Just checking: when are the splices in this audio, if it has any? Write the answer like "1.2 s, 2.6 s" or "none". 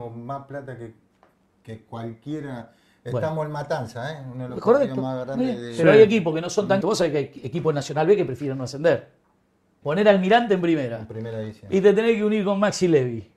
6.8 s, 9.8 s